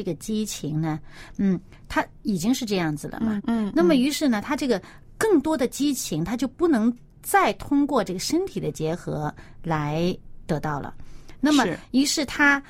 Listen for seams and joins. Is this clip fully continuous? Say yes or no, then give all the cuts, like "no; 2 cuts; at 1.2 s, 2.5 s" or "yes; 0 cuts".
no; 1 cut; at 3.4 s